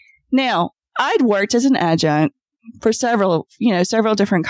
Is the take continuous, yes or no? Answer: yes